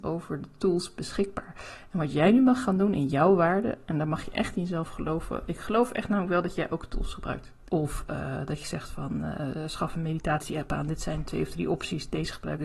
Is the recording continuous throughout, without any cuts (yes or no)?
no